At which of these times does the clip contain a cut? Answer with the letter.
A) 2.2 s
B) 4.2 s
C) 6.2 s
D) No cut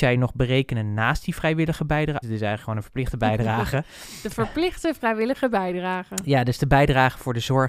A